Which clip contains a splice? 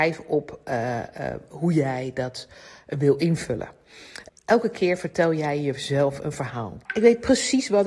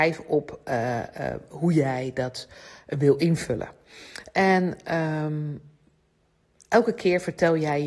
first; 2 cuts; at 4.3 s, 6.9 s

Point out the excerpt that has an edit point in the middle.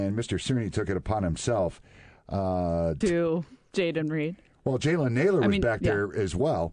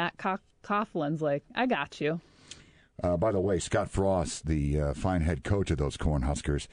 first; 1 cut; at 3.0 s

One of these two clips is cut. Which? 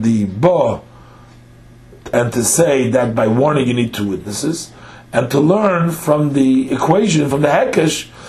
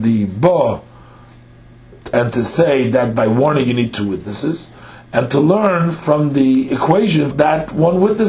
second; 1 cut; at 7.3 s

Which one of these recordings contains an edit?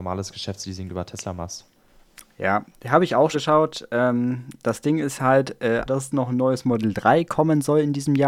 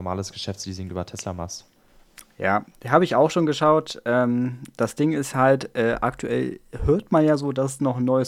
first; 2 cuts; at 3.3 s, 5.9 s

